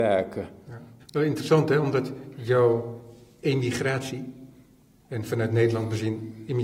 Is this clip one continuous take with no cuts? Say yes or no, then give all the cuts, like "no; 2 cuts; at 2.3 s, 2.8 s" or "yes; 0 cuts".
no; 1 cut; at 1.0 s